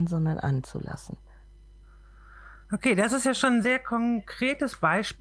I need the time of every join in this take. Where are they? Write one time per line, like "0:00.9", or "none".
0:03.6